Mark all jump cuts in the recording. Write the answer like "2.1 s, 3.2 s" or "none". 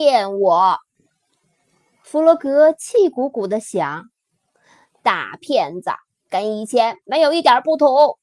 6.2 s